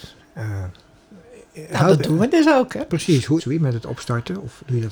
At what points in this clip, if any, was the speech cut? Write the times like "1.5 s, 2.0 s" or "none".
3.4 s